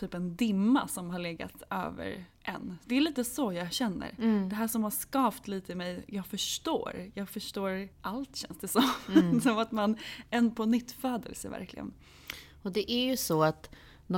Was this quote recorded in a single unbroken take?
no; 1 cut; at 7.9 s

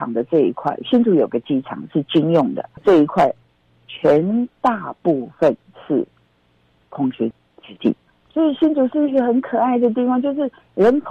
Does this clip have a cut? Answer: no; 0 cuts

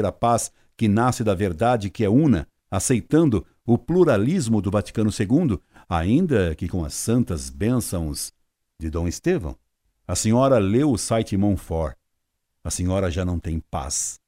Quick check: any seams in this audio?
no; 0 cuts

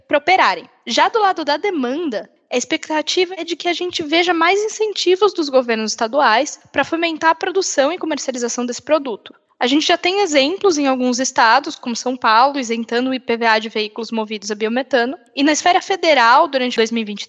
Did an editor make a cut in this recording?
no; 0 cuts

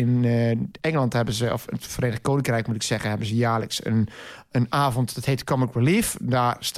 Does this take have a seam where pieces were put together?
no; 0 cuts

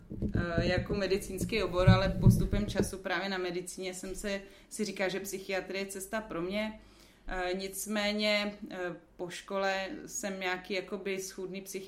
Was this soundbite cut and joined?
no; 0 cuts

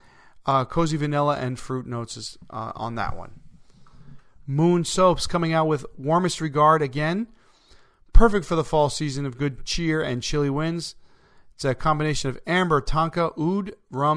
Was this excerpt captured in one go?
yes; 0 cuts

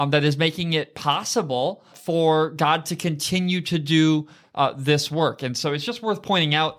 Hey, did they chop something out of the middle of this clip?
yes; 1 cut; at 1.9 s

